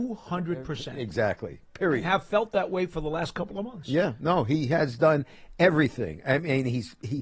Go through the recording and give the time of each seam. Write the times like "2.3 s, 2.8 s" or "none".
none